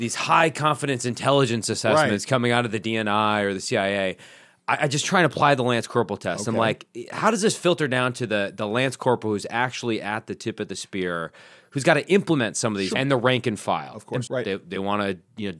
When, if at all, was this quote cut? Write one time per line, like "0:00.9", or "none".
0:12.9
0:14.3